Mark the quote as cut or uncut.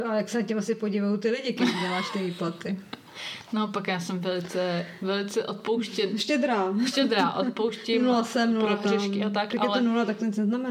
uncut